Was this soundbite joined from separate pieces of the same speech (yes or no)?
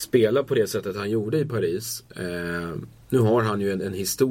no